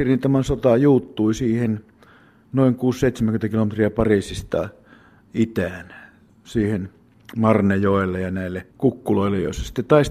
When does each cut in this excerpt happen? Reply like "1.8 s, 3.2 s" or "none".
8.7 s